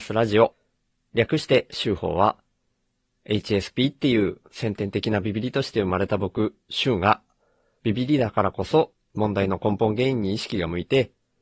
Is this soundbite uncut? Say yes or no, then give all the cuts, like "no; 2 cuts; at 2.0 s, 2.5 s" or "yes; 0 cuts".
yes; 0 cuts